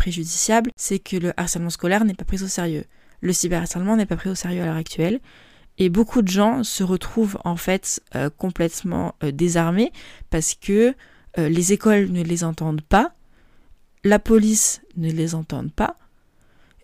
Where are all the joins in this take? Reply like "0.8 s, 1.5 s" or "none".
none